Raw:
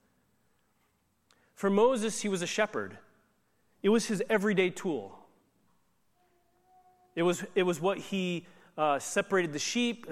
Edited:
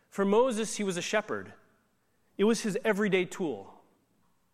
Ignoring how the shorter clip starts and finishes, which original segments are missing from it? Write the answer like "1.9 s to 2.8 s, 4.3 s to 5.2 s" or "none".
none

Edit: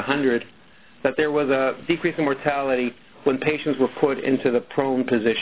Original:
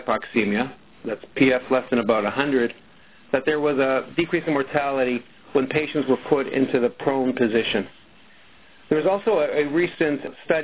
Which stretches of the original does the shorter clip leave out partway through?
none

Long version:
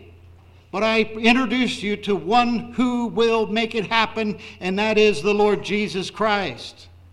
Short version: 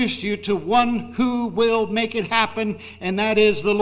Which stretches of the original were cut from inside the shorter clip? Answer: none

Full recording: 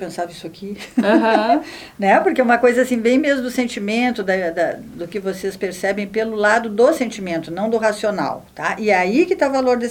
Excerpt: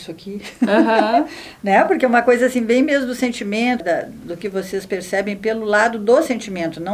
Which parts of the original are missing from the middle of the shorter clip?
4.2 s to 4.5 s

